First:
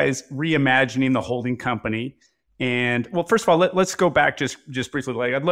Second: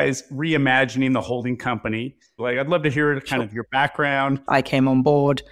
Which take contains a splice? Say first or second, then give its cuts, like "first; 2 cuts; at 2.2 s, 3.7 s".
second; 2 cuts; at 2.4 s, 4.5 s